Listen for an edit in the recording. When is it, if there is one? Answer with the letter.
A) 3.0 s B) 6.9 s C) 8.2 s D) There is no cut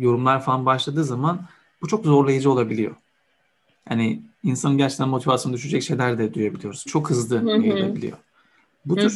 B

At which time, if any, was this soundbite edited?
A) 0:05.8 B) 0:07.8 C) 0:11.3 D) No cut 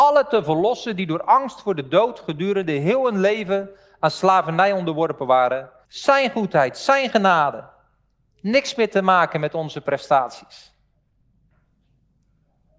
A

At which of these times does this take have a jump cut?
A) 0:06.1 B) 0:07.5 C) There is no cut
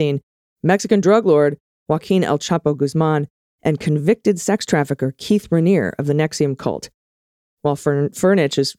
C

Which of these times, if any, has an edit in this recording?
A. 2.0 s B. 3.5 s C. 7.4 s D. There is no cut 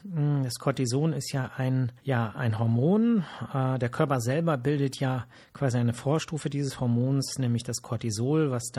A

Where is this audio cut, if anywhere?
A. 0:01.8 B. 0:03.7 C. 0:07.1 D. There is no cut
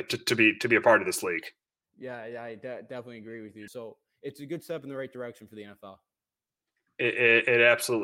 B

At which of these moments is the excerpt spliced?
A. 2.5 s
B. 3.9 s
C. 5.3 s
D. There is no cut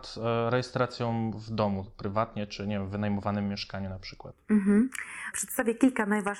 C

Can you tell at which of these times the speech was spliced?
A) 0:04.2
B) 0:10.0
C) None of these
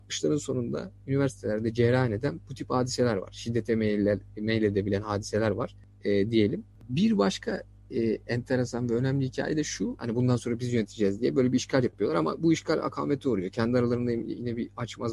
B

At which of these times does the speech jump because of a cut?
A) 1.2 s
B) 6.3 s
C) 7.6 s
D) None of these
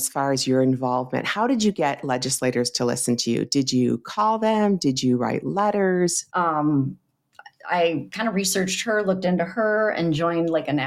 B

